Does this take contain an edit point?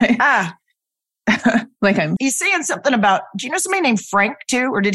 yes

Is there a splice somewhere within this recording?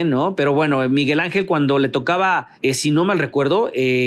yes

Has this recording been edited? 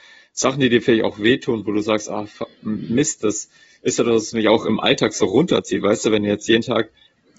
no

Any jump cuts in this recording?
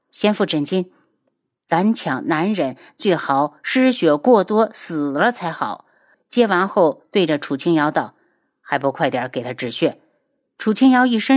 yes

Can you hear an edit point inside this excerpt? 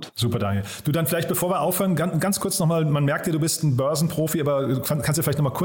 no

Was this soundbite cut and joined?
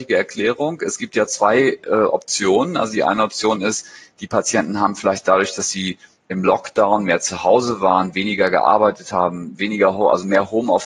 no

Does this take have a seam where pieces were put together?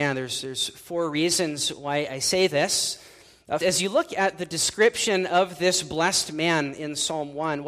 yes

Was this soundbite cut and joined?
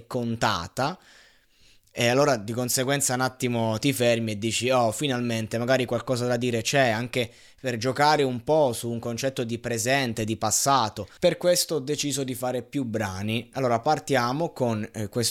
no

